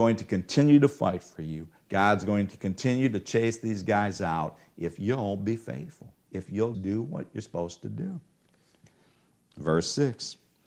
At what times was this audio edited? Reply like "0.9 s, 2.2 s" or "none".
6.7 s